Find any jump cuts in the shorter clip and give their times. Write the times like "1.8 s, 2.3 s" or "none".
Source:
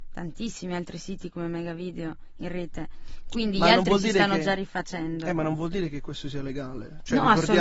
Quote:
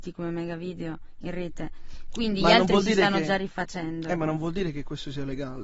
none

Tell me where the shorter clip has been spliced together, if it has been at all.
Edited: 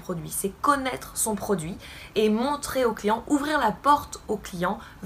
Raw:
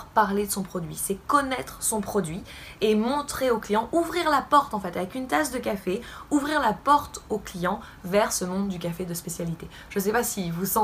3.2 s

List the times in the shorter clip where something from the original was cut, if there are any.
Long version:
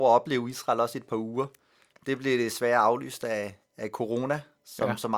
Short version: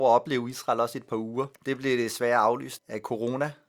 1.6 s, 2.8 s

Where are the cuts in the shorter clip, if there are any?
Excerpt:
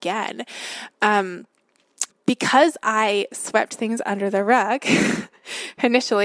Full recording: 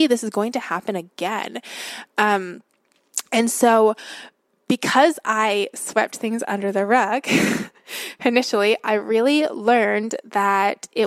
2.1 s

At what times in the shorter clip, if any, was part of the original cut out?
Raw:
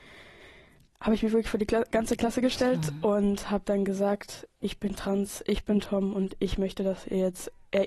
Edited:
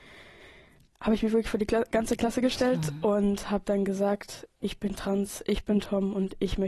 none

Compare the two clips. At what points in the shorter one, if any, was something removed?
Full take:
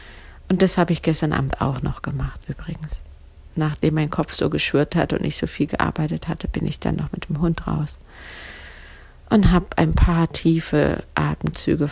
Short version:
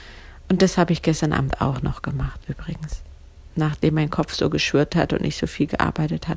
none

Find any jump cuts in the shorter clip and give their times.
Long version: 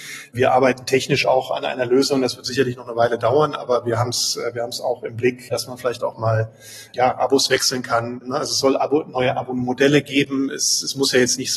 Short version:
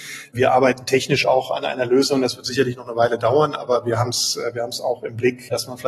none

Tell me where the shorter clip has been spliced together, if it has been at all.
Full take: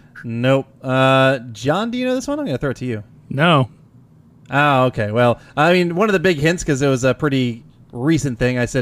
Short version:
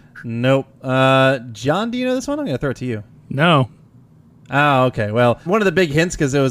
5.5 s

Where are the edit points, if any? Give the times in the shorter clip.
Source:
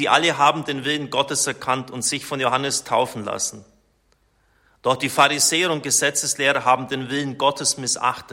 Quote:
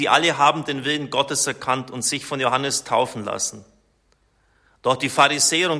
none

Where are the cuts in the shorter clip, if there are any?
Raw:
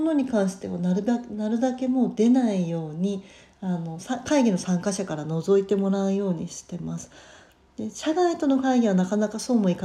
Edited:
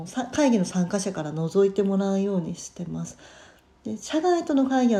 none

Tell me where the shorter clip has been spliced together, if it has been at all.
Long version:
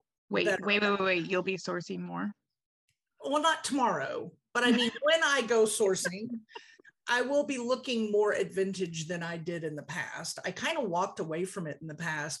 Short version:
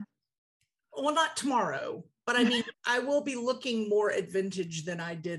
2.7 s

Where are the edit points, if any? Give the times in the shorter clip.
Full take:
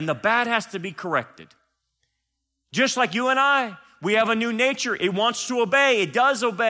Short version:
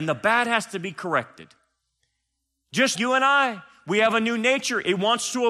2.9 s

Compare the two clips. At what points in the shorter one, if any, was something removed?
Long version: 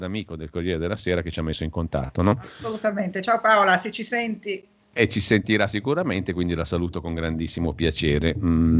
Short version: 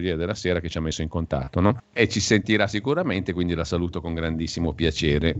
1.8 s

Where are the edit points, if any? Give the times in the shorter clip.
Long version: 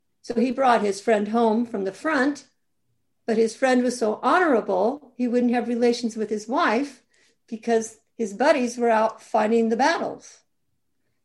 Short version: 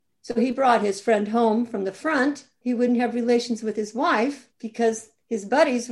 2.6 s, 4.5 s

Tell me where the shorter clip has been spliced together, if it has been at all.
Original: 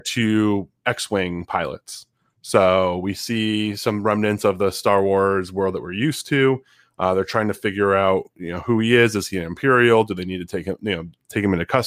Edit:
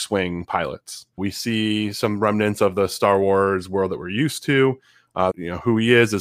1.2 s, 5.3 s

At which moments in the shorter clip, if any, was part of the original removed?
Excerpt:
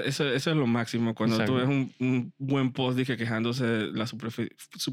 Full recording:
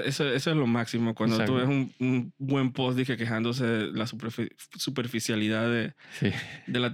none

